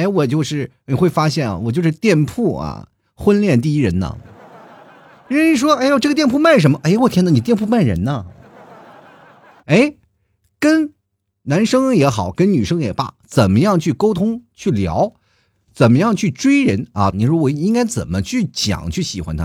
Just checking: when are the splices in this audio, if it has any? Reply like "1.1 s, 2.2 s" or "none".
9.6 s, 17.1 s